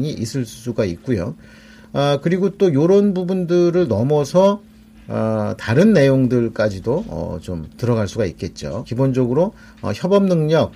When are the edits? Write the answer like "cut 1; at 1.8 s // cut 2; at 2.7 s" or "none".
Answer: cut 1; at 5.6 s // cut 2; at 8.8 s